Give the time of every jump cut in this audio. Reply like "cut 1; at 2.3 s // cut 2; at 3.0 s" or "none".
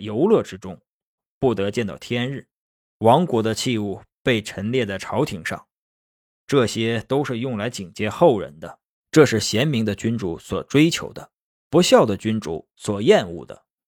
cut 1; at 1.2 s // cut 2; at 9.0 s